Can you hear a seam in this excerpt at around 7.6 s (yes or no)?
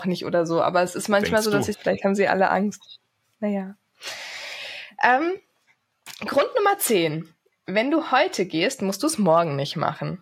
no